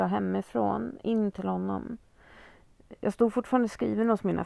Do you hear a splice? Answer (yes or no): no